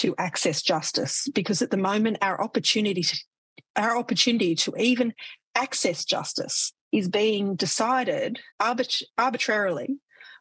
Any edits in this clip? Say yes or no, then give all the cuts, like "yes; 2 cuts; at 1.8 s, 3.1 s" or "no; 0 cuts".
yes; 2 cuts; at 6.8 s, 8.5 s